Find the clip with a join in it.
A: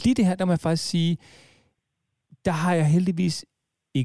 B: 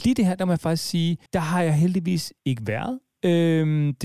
B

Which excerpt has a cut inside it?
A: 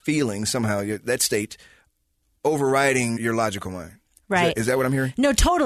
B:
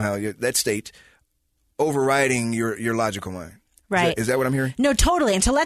A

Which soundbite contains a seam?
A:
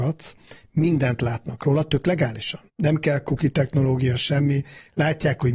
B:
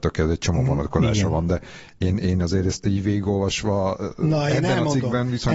A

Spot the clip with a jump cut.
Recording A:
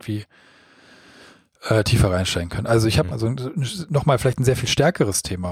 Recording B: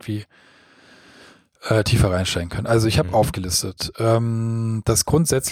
A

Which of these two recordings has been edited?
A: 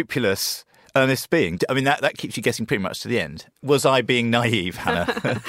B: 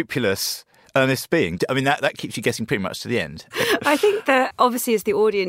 B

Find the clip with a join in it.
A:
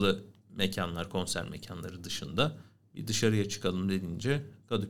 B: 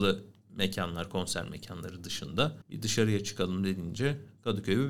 B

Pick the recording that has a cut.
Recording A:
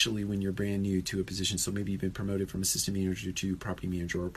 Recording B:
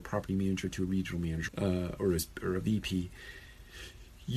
B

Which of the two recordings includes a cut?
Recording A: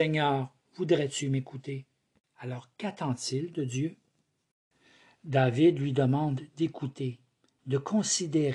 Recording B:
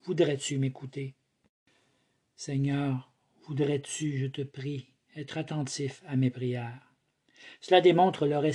A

